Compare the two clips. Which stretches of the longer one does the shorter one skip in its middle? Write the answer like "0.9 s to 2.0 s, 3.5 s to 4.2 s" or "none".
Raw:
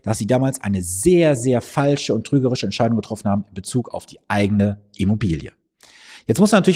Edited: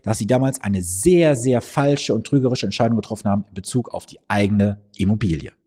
none